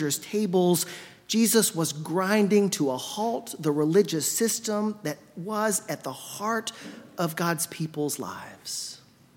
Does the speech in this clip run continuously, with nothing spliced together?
yes; 0 cuts

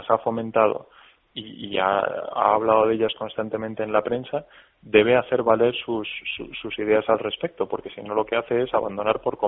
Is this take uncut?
yes; 0 cuts

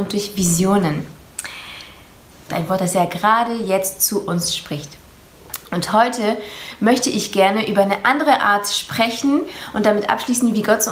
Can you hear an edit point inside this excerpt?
yes; 1 cut; at 2.5 s

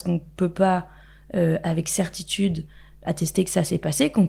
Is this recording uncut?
no; 1 cut; at 3.0 s

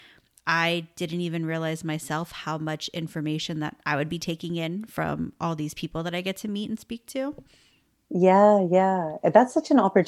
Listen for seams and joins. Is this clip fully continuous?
yes; 0 cuts

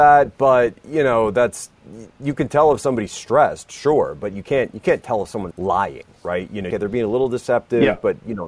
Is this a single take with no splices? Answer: no; 2 cuts; at 5.5 s, 6.7 s

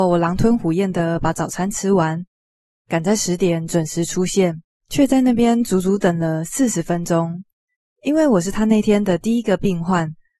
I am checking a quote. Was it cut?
no; 0 cuts

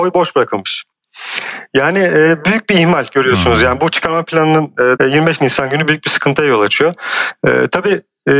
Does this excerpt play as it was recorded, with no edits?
no; 1 cut; at 5.0 s

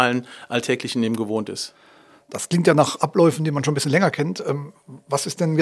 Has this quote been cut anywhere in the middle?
no; 0 cuts

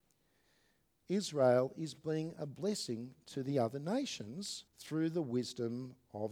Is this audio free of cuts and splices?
no; 2 cuts; at 1.0 s, 4.7 s

